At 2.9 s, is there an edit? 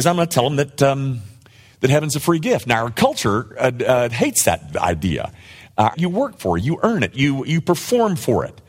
no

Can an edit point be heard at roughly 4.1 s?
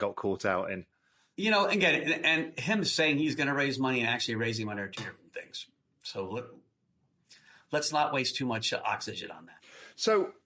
no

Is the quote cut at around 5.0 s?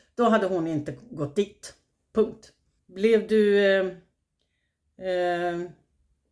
no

